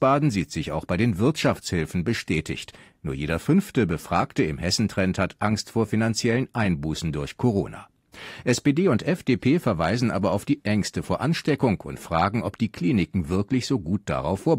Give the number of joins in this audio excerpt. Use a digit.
0